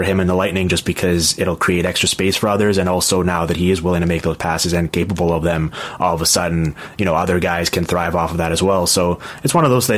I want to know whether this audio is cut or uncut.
uncut